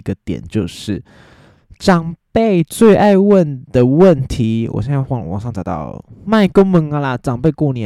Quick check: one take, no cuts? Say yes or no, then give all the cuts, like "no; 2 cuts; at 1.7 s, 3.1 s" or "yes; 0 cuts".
yes; 0 cuts